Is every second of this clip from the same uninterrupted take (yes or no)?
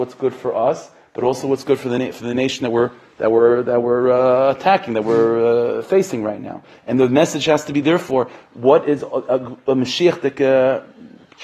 yes